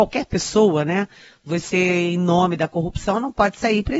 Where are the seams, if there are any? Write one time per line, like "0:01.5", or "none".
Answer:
none